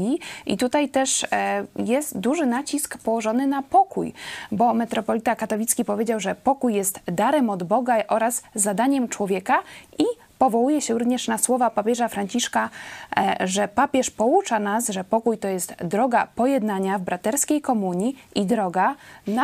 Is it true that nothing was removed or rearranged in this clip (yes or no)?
yes